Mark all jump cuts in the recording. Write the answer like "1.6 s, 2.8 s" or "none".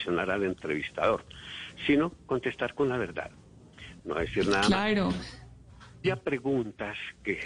4.0 s, 6.0 s